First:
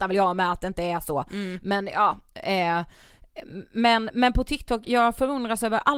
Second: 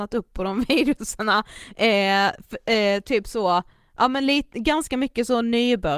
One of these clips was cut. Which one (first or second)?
first